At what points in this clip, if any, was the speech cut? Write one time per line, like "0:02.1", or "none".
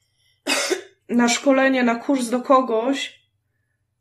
none